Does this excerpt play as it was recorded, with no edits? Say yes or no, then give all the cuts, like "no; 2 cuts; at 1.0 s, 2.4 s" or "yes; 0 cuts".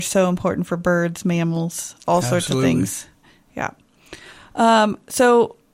yes; 0 cuts